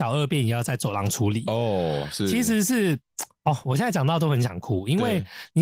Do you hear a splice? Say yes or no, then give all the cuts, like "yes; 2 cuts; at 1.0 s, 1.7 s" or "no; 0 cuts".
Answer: no; 0 cuts